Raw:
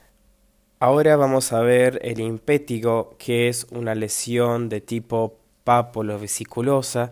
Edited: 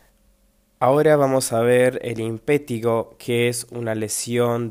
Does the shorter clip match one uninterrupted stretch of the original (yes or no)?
yes